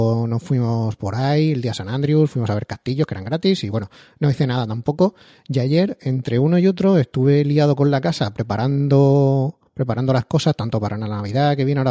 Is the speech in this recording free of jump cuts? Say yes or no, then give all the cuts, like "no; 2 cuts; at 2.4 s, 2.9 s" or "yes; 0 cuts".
yes; 0 cuts